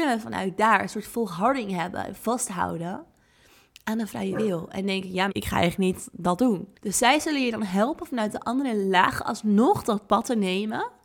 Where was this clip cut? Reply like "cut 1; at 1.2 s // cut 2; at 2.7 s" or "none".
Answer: cut 1; at 5.3 s // cut 2; at 6.7 s